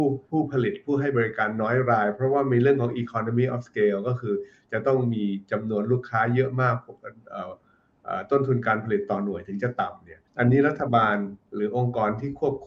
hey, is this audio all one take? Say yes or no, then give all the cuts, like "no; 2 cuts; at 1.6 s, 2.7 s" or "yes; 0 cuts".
no; 1 cut; at 10.3 s